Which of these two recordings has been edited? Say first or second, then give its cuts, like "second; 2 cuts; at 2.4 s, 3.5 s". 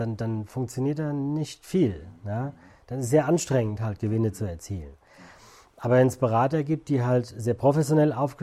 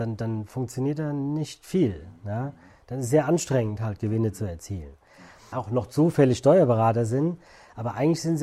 second; 1 cut; at 5.5 s